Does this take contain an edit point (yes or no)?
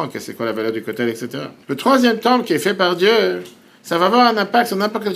yes